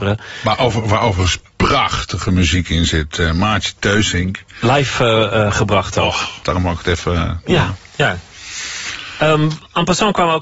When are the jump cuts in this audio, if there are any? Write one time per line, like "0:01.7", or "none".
0:06.4